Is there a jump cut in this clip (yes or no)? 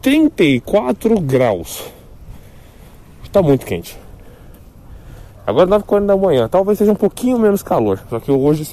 no